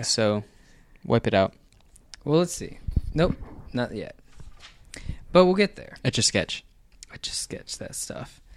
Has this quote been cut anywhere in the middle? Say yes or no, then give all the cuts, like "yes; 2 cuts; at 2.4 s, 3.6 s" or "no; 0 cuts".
no; 0 cuts